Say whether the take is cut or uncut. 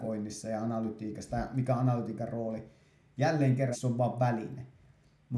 cut